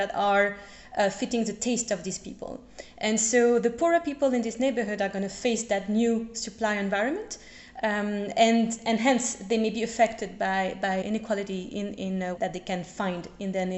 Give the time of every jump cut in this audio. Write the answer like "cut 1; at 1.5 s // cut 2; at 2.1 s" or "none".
cut 1; at 11.0 s // cut 2; at 12.4 s